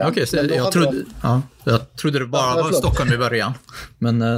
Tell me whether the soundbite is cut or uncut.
uncut